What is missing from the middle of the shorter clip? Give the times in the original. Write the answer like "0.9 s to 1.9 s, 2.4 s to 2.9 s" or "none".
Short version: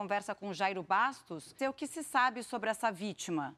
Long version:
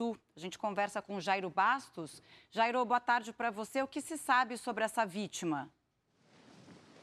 2.3 s to 3.7 s